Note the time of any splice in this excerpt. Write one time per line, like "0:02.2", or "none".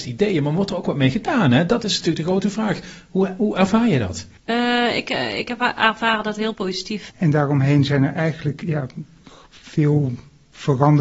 0:04.4
0:07.1